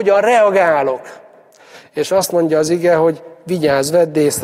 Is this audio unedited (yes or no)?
yes